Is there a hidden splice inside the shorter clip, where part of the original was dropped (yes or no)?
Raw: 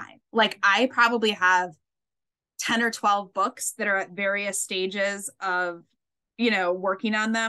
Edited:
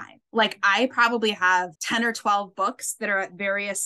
yes